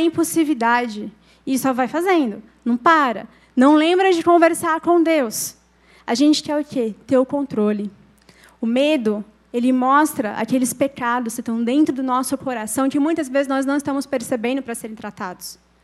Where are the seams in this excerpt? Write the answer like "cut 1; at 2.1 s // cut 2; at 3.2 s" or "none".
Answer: none